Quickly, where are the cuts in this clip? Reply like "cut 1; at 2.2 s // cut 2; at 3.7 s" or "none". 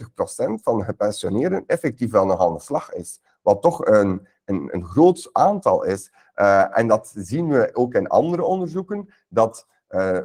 none